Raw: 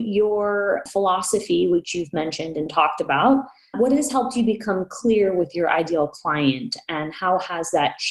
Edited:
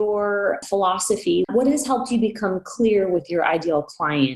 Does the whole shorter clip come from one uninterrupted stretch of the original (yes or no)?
no